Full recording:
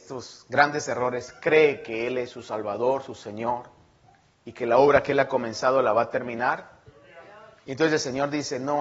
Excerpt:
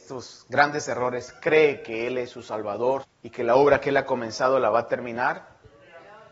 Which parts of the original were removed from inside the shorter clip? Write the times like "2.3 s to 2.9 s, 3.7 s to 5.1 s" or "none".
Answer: 3.0 s to 4.3 s